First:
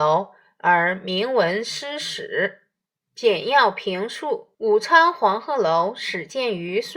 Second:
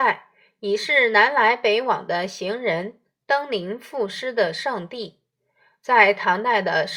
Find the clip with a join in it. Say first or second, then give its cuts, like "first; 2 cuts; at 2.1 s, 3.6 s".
first; 2 cuts; at 2.9 s, 4.5 s